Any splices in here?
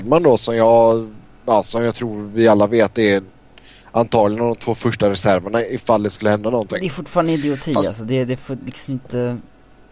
no; 0 cuts

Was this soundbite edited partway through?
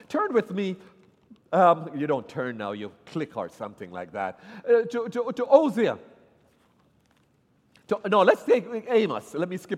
no; 0 cuts

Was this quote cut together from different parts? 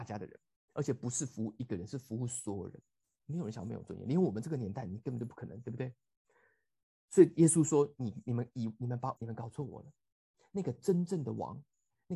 yes; 2 cuts; at 3.2 s, 9.2 s

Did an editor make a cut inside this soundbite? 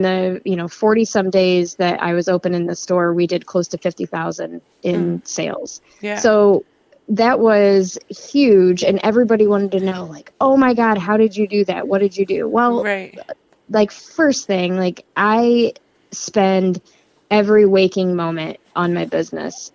no; 0 cuts

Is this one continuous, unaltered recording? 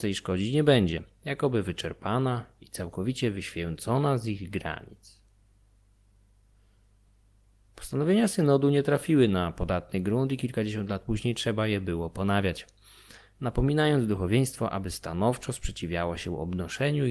yes; 0 cuts

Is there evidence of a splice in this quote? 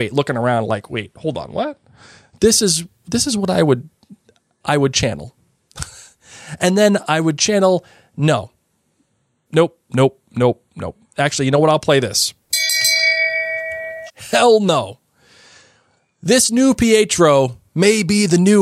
yes; 3 cuts; at 9.5 s, 10.7 s, 14.1 s

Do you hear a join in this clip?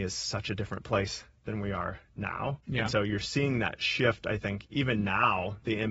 yes; 1 cut; at 2.6 s

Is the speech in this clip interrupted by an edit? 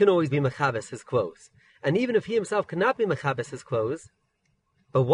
no; 0 cuts

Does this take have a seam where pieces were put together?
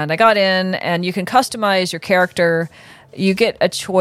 no; 0 cuts

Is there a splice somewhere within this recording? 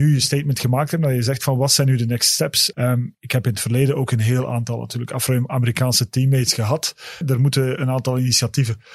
yes; 2 cuts; at 2.7 s, 7.2 s

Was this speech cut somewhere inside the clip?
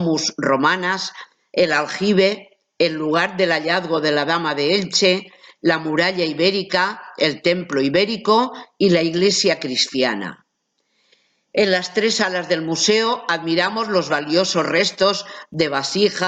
no; 0 cuts

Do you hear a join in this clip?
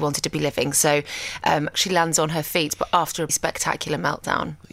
yes; 2 cuts; at 1.7 s, 3.3 s

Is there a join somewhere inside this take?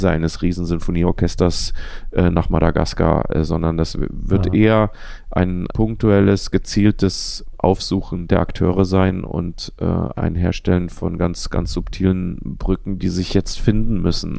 no; 0 cuts

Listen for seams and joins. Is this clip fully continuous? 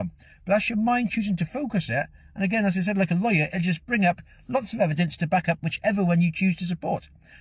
yes; 0 cuts

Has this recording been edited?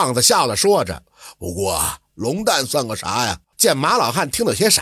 yes; 1 cut; at 3.5 s

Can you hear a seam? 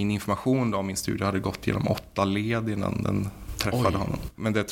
no; 0 cuts

